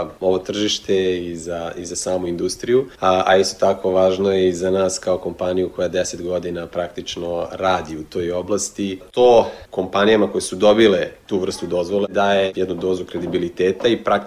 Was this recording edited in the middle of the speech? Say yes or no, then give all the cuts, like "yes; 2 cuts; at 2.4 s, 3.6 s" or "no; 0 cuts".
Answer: no; 0 cuts